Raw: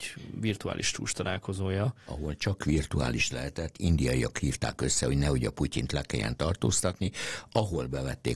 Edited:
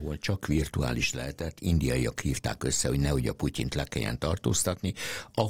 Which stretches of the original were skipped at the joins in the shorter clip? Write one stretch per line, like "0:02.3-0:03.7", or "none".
none

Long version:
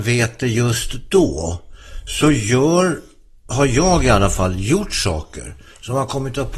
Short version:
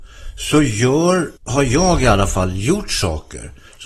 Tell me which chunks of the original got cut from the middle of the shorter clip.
0:03.1-0:03.4

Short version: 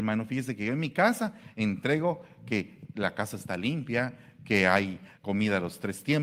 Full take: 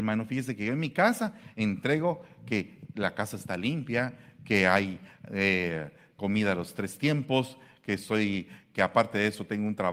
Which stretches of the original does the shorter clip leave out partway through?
0:05.2-0:06.1

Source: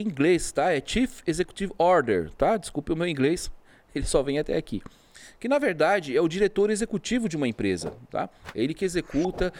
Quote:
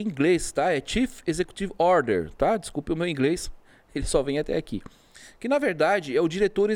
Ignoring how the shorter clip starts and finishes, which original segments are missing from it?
none

